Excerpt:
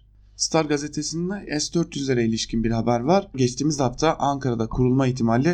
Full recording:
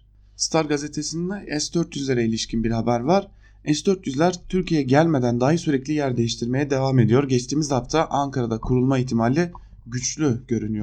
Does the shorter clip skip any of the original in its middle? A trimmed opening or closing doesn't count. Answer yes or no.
yes